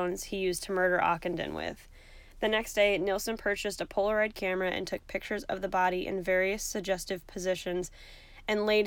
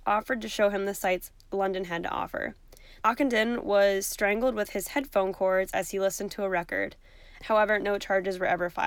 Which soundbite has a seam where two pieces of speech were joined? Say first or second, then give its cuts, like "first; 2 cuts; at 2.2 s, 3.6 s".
second; 2 cuts; at 3.0 s, 7.4 s